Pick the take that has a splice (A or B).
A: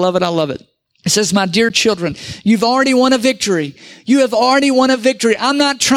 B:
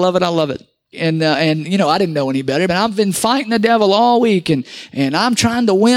B